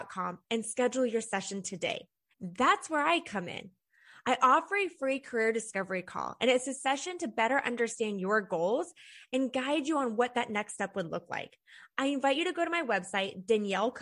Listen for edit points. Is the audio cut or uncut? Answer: cut